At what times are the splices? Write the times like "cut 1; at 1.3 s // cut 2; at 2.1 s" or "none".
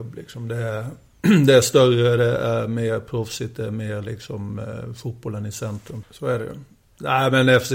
cut 1; at 6.0 s

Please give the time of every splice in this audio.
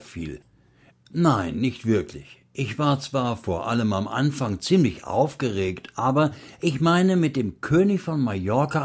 cut 1; at 0.9 s

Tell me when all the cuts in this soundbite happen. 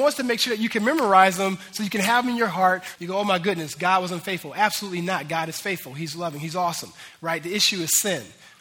cut 1; at 3.0 s

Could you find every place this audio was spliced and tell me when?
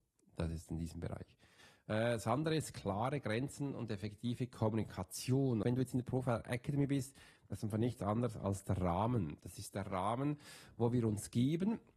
cut 1; at 5.6 s

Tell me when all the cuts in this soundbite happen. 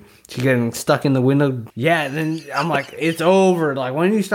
cut 1; at 1.7 s

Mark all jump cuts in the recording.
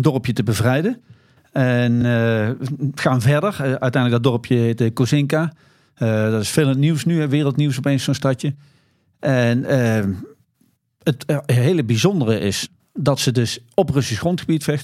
none

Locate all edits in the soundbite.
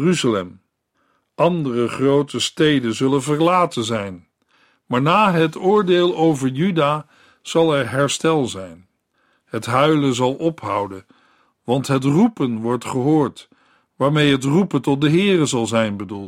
none

